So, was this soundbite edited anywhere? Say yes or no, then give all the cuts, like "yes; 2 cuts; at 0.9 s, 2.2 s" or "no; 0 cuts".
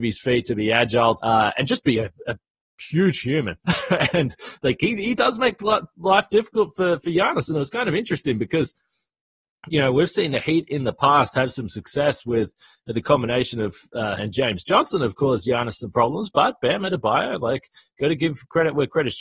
yes; 2 cuts; at 1.2 s, 14.2 s